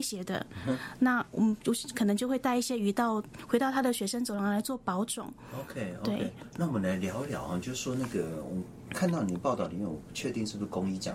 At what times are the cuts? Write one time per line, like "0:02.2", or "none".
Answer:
none